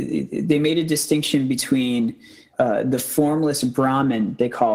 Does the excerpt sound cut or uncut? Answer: cut